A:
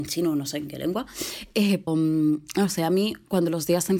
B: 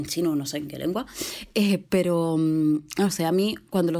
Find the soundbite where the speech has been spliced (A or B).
A